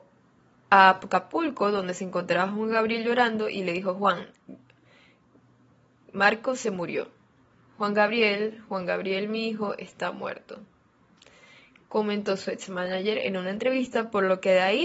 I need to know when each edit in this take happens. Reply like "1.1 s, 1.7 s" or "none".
none